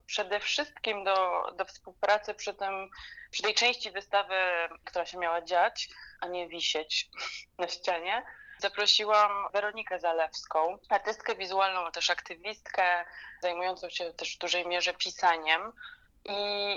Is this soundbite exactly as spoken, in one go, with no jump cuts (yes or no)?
no